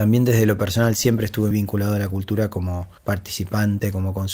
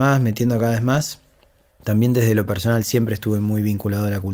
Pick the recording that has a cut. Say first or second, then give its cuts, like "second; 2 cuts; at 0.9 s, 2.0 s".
first; 2 cuts; at 1.5 s, 3.0 s